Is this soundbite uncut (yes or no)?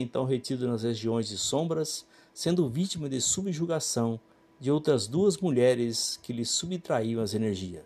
yes